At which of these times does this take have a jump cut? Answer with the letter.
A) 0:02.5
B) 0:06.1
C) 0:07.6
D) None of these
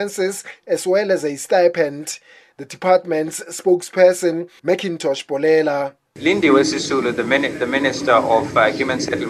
D